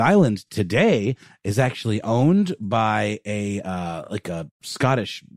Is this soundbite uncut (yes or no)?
yes